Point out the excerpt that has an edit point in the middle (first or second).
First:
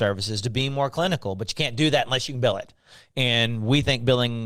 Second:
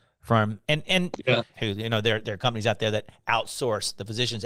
second